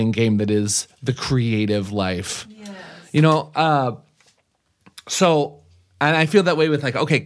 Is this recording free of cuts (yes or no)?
yes